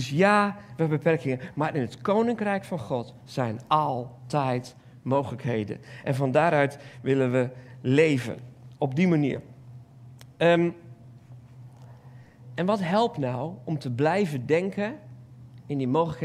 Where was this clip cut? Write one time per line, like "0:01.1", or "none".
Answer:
none